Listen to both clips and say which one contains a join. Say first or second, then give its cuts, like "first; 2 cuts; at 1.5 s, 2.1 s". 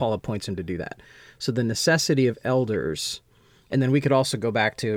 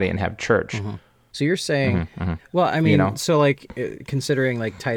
second; 2 cuts; at 1.3 s, 2.4 s